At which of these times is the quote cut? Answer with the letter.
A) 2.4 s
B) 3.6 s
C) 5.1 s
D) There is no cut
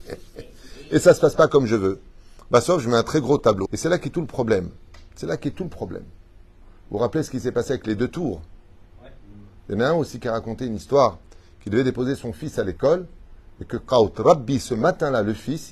B